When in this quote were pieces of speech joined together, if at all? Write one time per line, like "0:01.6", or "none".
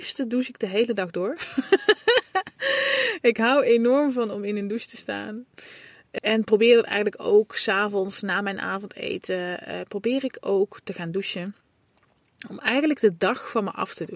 0:06.2